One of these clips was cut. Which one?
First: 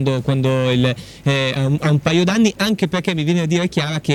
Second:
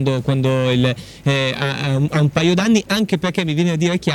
first; 1 cut; at 1.6 s

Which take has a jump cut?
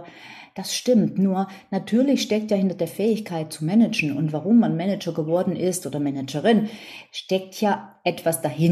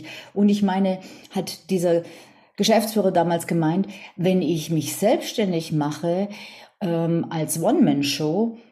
second; 1 cut; at 4.2 s

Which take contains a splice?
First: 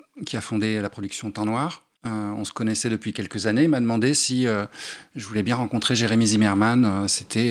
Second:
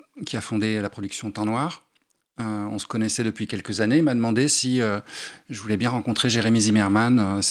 first; 1 cut; at 1.9 s

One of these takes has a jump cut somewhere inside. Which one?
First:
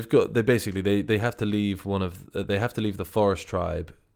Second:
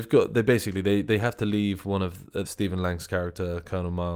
second; 1 cut; at 2.4 s

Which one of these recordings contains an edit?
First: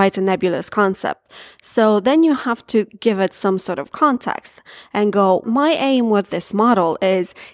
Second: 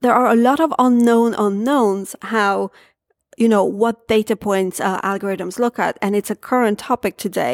first; 1 cut; at 5.4 s

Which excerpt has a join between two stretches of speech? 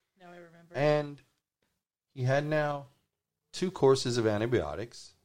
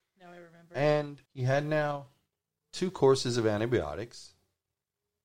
second; 1 cut; at 1.3 s

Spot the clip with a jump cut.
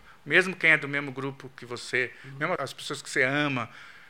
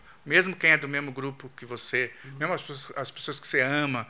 first; 1 cut; at 2.6 s

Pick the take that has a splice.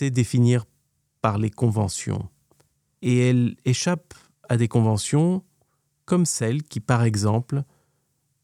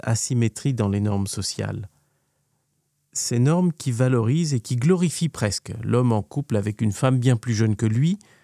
first; 1 cut; at 3.0 s

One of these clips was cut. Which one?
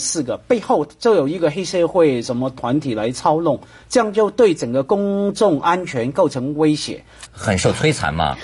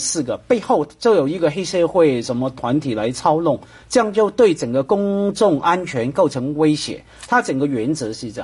first; 1 cut; at 7.3 s

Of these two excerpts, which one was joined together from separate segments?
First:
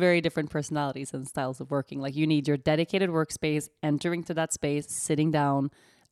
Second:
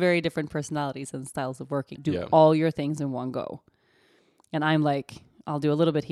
second; 1 cut; at 1.9 s

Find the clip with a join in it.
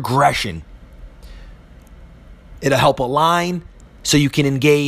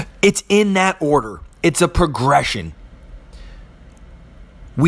first; 1 cut; at 2.6 s

